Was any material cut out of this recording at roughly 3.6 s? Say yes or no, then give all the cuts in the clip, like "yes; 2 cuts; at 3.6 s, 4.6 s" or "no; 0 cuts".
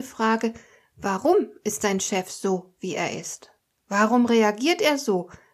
no; 0 cuts